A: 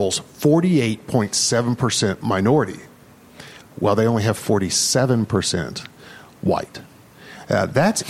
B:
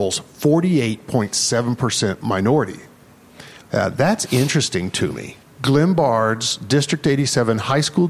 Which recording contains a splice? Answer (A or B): B